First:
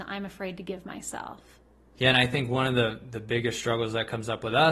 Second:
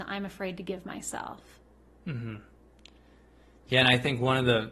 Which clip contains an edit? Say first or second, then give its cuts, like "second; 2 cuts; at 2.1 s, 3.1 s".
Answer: first; 1 cut; at 1.9 s